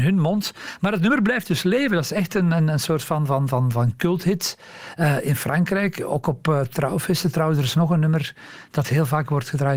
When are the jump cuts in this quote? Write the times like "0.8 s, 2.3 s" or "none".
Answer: none